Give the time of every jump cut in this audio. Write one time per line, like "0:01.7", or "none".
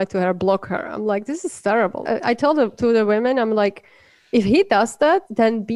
0:02.0